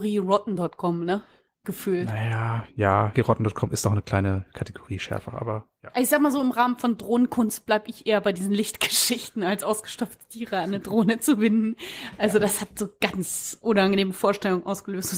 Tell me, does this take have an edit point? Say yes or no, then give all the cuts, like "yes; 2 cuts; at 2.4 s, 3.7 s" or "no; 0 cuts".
yes; 1 cut; at 3.1 s